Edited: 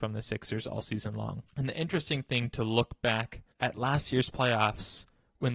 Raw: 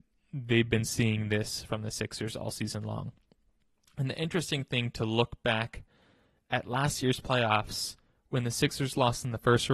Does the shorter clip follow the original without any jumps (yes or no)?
no